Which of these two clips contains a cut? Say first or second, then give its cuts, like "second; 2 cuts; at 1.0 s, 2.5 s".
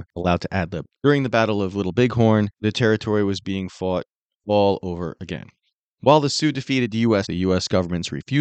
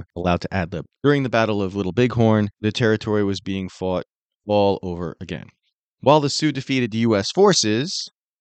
first; 1 cut; at 7.2 s